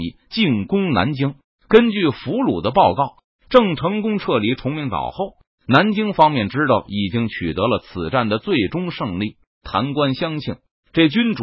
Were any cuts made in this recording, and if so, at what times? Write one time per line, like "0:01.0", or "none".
0:09.6